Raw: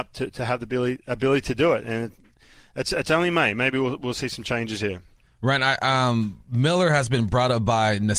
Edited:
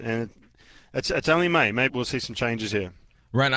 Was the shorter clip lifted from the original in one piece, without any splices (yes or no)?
no